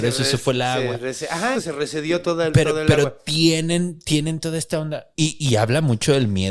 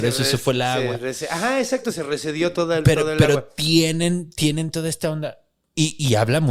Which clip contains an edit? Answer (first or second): first